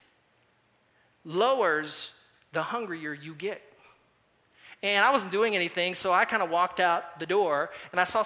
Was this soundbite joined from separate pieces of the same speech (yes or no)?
yes